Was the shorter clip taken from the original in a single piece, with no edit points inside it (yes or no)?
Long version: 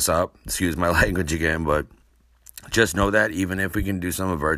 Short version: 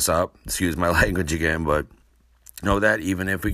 no